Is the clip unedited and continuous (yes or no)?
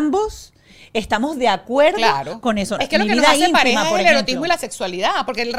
no